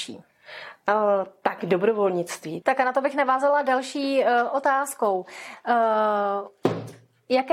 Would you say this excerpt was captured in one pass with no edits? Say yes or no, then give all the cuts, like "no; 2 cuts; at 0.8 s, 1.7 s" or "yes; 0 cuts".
no; 1 cut; at 2.6 s